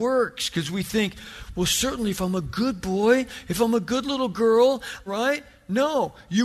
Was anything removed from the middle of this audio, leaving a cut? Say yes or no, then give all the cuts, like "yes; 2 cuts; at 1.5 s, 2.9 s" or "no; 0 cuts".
yes; 1 cut; at 5.1 s